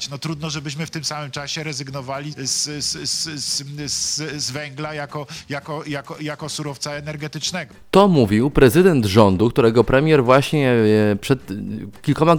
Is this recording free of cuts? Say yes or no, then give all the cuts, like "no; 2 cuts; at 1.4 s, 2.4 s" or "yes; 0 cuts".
no; 1 cut; at 2.3 s